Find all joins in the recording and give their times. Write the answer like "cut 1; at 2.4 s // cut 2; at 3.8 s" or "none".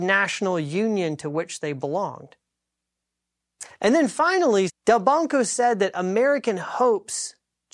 cut 1; at 4.7 s